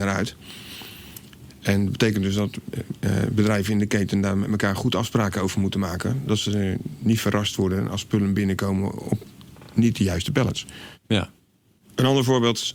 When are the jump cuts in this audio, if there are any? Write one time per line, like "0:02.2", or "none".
none